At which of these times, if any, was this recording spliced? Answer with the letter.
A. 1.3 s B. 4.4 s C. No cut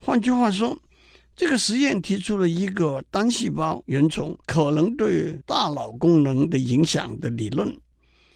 B